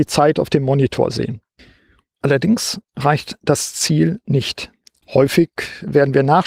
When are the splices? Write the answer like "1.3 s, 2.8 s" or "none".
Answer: 5.0 s